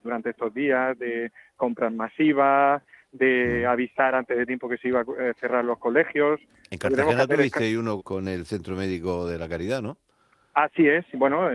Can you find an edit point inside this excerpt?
yes; 1 cut; at 8.0 s

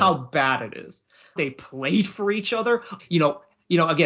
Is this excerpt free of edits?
no; 2 cuts; at 1.4 s, 3.0 s

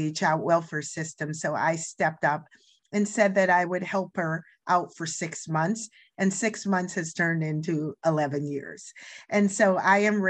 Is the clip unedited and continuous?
yes; 0 cuts

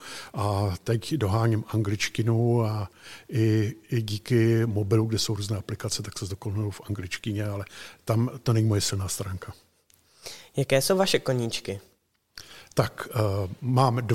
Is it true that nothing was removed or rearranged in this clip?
yes; 0 cuts

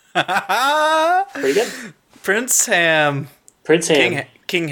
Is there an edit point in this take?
no; 0 cuts

